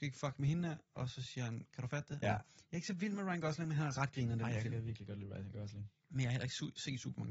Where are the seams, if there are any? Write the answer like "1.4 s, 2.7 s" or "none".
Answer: 2.2 s